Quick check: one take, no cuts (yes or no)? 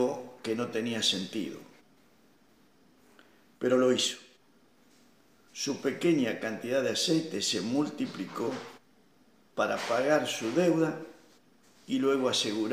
no